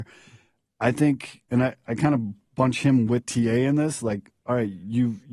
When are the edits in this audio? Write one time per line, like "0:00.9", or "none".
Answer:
0:01.5